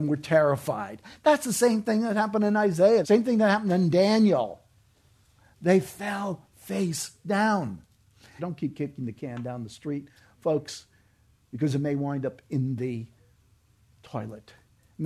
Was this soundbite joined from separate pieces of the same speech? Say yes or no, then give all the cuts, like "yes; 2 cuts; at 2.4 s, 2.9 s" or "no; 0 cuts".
yes; 2 cuts; at 3.0 s, 8.4 s